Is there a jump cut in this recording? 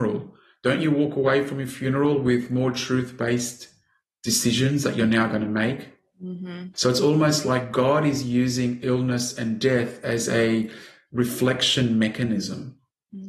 yes; 1 cut; at 6.7 s

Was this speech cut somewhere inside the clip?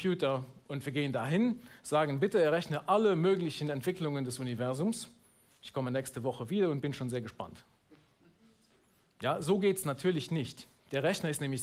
no; 0 cuts

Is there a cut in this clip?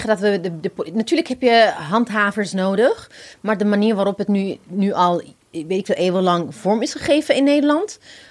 no; 0 cuts

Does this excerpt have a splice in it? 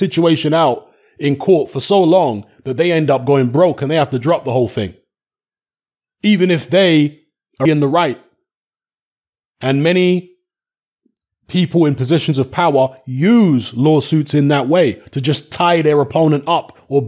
yes; 1 cut; at 7.6 s

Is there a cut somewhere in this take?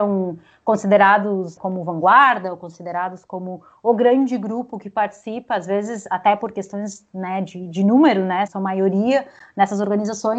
yes; 2 cuts; at 1.6 s, 8.5 s

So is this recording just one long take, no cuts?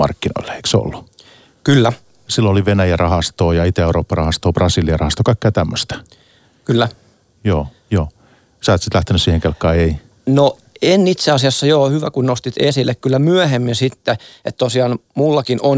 yes; 0 cuts

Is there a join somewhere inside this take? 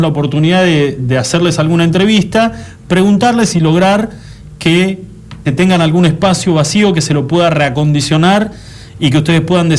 yes; 2 cuts; at 1.0 s, 5.5 s

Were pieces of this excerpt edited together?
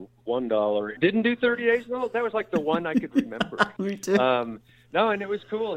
yes; 1 cut; at 1.0 s

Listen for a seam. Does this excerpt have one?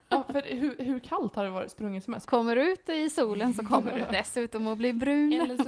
yes; 1 cut; at 2.2 s

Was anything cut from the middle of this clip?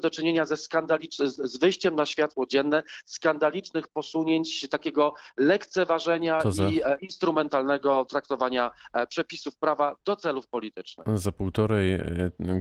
no; 0 cuts

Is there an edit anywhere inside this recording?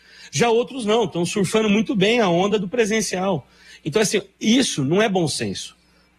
no; 0 cuts

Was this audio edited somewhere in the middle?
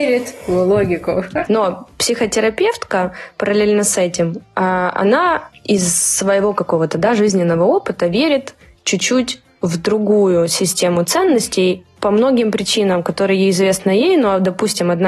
yes; 1 cut; at 1.5 s

